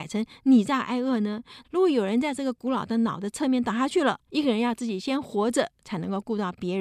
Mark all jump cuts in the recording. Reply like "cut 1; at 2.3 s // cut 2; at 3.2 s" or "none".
cut 1; at 1.6 s // cut 2; at 4.3 s